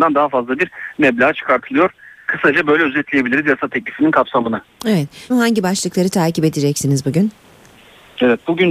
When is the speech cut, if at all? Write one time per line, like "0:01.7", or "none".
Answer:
0:05.3